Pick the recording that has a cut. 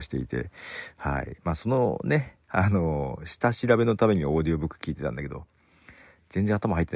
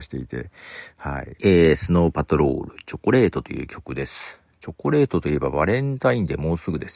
second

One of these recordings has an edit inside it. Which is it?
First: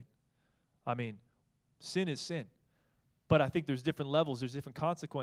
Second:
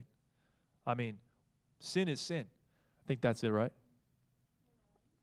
second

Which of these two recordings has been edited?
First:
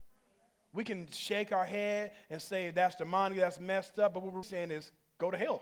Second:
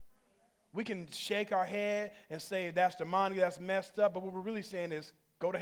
first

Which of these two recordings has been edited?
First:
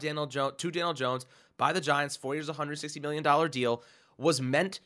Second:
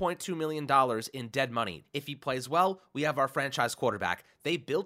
second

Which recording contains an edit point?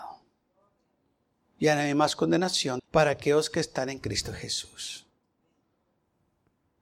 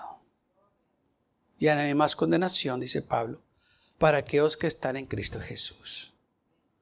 first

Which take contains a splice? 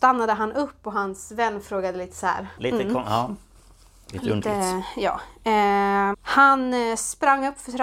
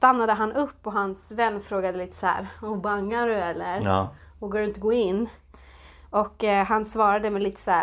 first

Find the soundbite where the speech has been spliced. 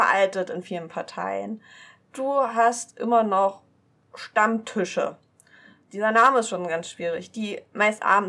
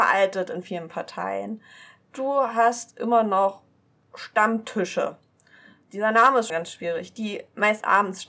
second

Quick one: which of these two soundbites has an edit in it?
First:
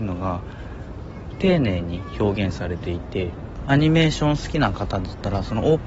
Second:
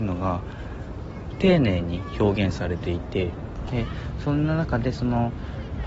second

